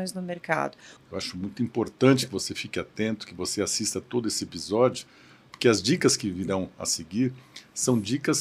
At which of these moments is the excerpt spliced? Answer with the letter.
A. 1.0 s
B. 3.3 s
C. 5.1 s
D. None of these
A